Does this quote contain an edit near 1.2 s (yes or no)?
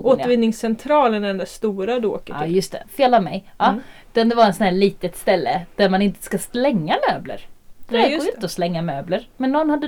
no